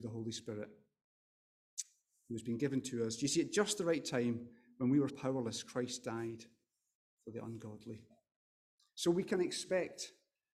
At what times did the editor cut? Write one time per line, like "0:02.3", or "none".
0:05.1